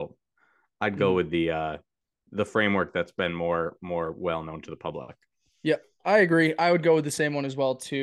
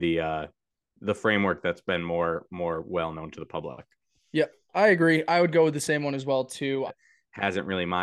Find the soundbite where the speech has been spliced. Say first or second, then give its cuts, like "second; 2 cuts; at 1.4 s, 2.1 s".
second; 1 cut; at 6.9 s